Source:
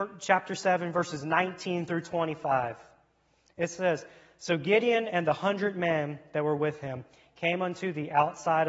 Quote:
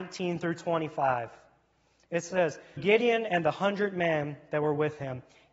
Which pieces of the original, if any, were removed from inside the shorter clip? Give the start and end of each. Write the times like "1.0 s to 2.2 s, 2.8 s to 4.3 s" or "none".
4.2 s to 4.6 s